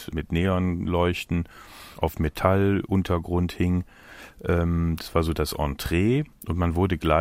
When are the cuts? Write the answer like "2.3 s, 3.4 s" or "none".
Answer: none